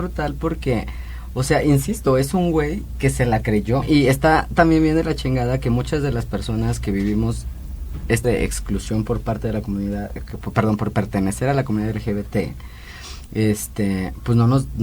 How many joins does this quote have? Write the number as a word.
two